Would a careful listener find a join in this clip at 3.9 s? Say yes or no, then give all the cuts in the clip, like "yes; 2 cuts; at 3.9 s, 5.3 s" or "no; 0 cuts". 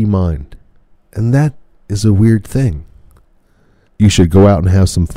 yes; 2 cuts; at 0.9 s, 3.9 s